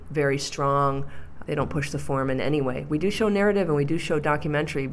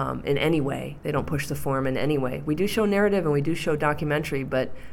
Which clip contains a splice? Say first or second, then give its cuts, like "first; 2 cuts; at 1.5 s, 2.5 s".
first; 1 cut; at 1.4 s